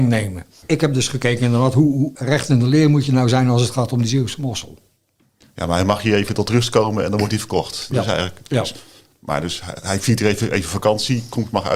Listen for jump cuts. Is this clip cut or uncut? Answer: uncut